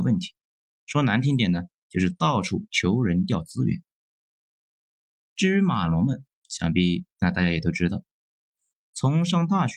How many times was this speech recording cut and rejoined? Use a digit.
0